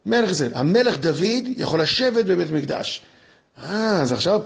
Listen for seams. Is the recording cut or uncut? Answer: uncut